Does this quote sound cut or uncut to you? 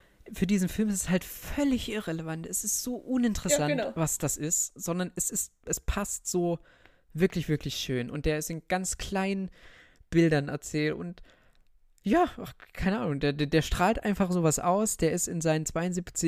uncut